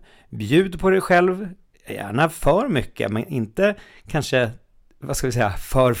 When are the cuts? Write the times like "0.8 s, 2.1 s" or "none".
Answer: none